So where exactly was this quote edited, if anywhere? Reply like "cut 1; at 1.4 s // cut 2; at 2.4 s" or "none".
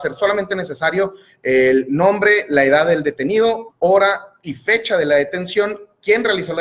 cut 1; at 3.7 s

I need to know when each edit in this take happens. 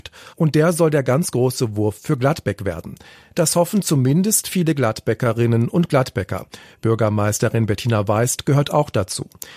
none

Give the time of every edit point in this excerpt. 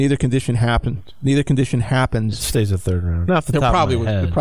cut 1; at 3.2 s

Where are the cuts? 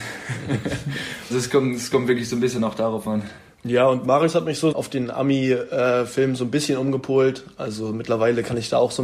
cut 1; at 1.3 s // cut 2; at 4.7 s

